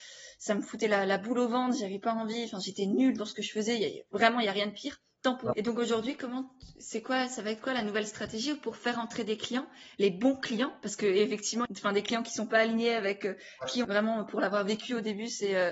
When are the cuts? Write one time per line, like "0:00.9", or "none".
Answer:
0:05.5
0:11.7
0:13.8